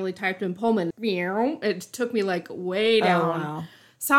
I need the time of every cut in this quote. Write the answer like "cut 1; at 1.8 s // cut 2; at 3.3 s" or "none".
cut 1; at 0.9 s